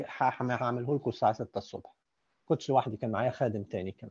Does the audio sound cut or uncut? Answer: uncut